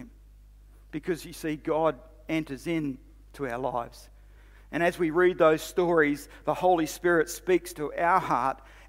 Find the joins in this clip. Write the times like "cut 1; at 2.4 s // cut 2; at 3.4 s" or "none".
none